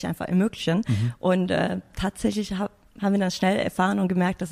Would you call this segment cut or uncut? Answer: uncut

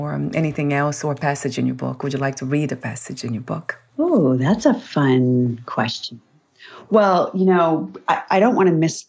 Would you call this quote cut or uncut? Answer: cut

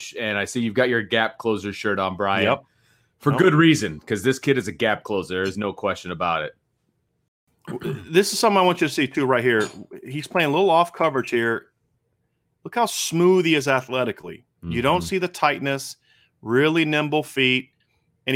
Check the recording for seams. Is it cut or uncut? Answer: uncut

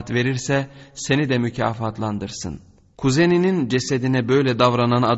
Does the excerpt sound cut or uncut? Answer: cut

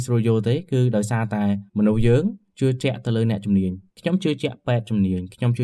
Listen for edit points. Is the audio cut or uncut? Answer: cut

